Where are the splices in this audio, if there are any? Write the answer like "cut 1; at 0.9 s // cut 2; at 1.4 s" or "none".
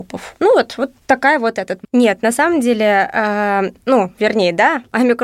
cut 1; at 1.8 s